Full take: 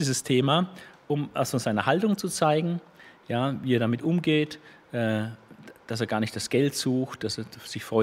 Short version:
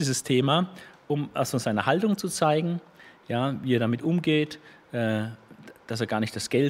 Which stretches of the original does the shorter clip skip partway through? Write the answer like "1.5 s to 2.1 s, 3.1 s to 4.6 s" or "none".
none

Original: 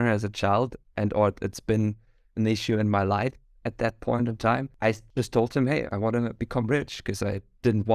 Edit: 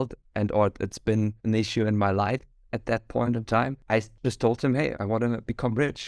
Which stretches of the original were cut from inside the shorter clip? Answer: 2.0 s to 2.3 s

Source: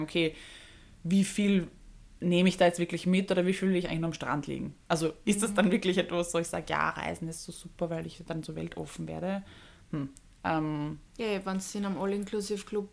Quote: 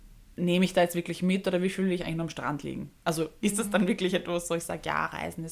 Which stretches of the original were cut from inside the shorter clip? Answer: none

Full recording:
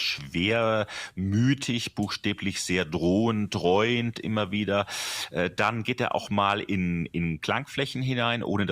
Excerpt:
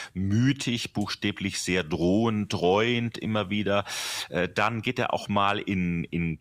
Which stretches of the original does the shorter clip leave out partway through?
none

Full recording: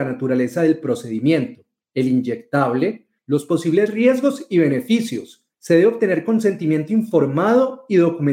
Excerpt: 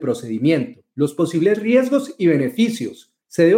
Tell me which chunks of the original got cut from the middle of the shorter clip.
1.7 s to 3.2 s

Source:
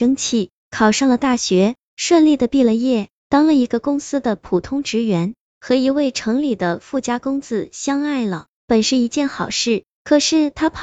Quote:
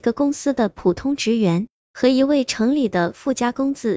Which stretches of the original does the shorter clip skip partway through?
none

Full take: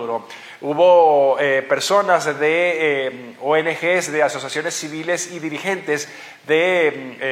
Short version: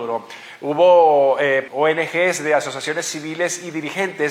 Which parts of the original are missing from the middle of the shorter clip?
1.7 s to 3.4 s

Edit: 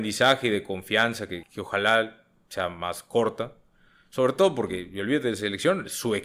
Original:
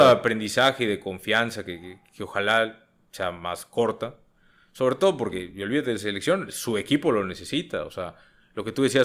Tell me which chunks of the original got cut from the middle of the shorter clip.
1.8 s to 2.1 s

